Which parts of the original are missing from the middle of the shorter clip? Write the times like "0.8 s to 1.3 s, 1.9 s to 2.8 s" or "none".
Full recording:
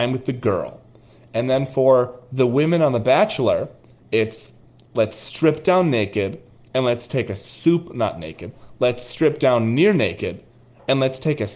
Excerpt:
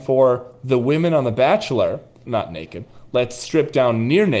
3.9 s to 7.9 s